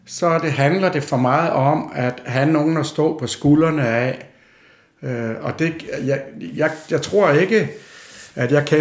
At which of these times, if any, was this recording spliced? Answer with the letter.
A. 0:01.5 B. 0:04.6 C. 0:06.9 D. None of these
D